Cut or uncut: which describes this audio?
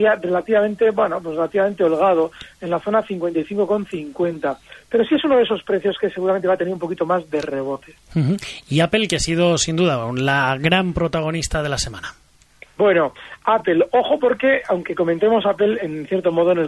uncut